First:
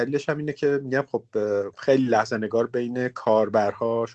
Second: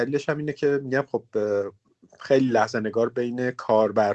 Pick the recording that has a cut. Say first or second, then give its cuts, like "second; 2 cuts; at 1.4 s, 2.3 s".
first; 1 cut; at 1.7 s